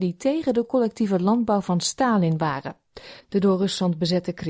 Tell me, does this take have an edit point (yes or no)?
yes